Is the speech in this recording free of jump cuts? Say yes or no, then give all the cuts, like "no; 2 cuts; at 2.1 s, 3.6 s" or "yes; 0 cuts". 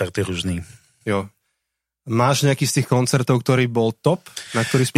yes; 0 cuts